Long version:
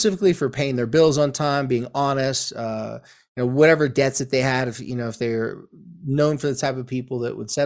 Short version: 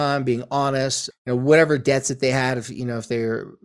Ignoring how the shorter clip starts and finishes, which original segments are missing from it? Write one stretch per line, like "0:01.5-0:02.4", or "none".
0:02.5-0:03.2